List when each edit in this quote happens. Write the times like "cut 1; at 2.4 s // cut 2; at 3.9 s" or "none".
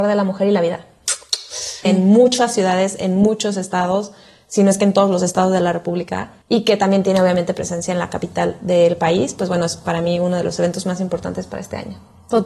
cut 1; at 1.8 s // cut 2; at 6.4 s